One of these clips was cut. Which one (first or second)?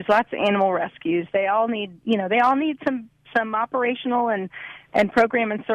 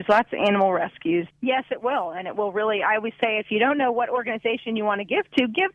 second